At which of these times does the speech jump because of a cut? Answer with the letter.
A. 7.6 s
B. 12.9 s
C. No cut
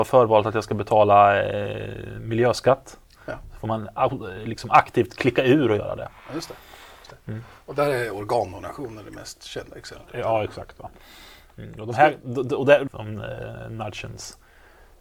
B